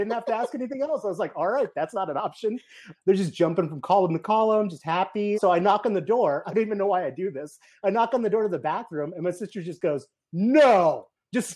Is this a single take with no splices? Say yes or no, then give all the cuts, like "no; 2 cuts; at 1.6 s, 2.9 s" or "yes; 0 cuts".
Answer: no; 2 cuts; at 2.9 s, 5.3 s